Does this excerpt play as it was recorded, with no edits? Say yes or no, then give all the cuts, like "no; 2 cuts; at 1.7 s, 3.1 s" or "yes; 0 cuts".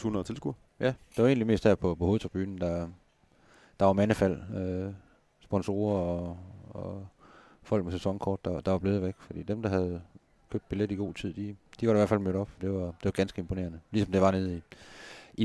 no; 1 cut; at 12.6 s